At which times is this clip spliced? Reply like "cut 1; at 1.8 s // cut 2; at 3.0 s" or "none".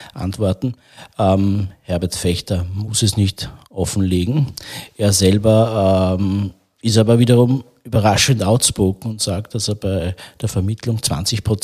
none